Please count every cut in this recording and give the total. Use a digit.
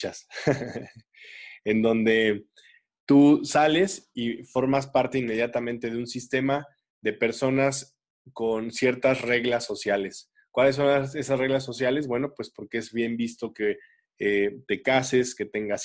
0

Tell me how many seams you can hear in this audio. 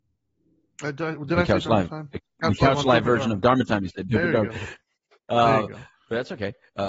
0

